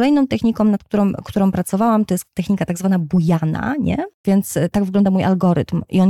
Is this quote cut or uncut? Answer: cut